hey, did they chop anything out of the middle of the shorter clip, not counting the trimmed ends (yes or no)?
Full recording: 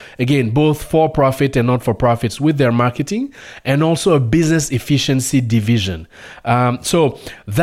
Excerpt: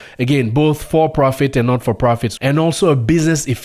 yes